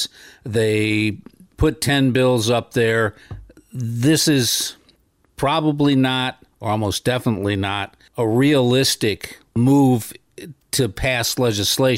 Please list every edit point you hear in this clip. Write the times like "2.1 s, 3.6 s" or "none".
none